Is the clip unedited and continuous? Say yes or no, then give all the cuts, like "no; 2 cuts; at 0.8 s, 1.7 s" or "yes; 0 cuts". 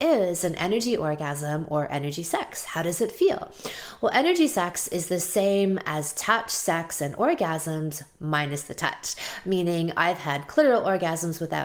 yes; 0 cuts